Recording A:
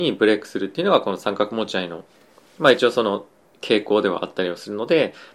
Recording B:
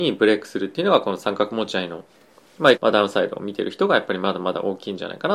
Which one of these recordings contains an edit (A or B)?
B